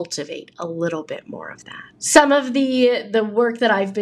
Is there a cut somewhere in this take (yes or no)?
yes